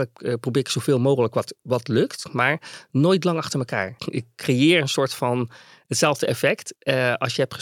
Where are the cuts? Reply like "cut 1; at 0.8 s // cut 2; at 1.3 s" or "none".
cut 1; at 4.0 s